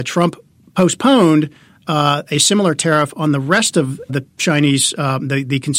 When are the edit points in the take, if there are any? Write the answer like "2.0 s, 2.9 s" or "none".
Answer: 4.1 s